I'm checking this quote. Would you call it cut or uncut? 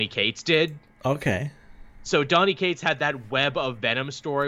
uncut